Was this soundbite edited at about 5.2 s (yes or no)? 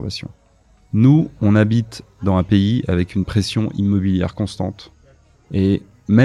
no